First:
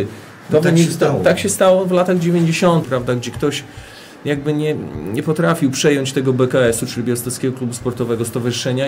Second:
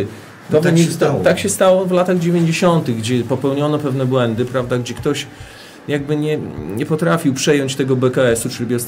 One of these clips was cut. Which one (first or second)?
first